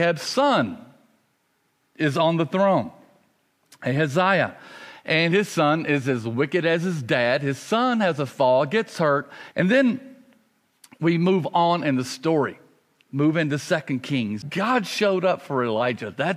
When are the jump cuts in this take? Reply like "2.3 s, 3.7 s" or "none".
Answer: 9.5 s, 14.4 s